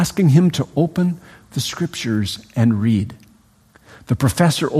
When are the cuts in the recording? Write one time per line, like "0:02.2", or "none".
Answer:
none